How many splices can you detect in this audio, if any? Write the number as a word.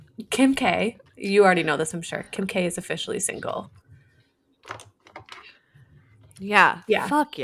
zero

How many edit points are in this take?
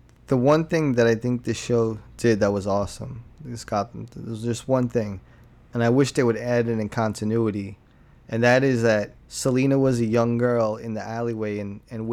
one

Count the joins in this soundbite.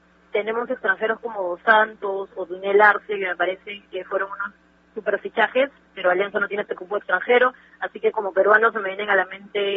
zero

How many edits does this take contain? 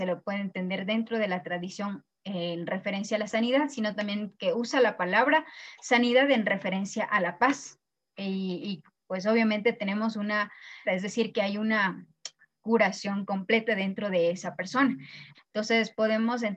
two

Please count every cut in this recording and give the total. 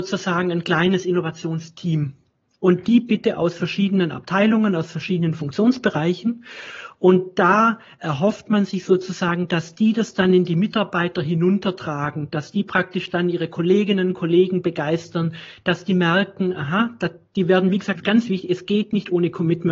one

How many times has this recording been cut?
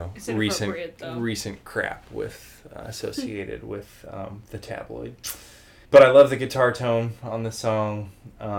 one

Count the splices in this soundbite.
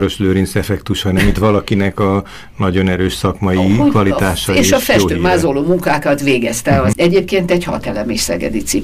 one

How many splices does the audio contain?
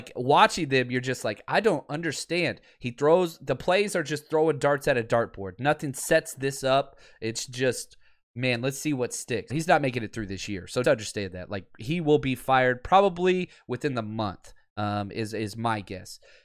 two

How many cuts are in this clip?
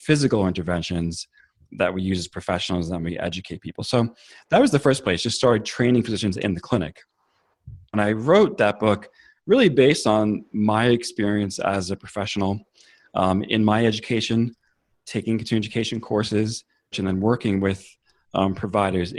two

